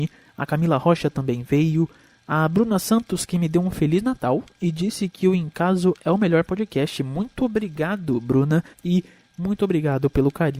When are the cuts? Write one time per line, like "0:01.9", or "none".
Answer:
0:08.7